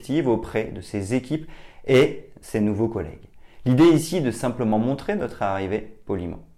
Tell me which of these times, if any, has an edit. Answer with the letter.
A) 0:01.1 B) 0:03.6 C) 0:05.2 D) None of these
D